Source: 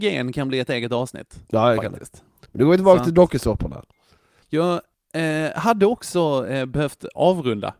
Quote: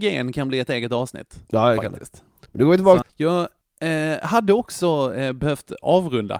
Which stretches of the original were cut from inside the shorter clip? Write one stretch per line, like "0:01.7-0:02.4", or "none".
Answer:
0:03.0-0:04.3